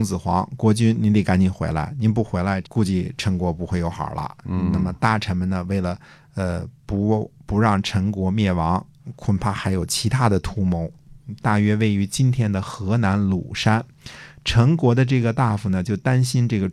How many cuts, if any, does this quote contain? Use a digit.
2